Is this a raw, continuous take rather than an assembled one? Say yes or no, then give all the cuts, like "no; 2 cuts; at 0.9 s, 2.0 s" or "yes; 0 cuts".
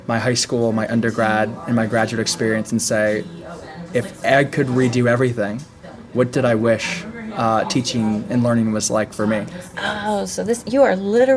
yes; 0 cuts